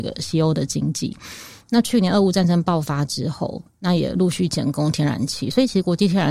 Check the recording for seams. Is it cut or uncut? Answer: uncut